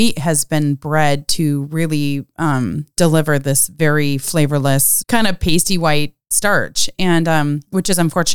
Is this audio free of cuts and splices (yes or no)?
no